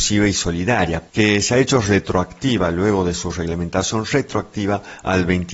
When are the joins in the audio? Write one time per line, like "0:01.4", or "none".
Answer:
0:01.1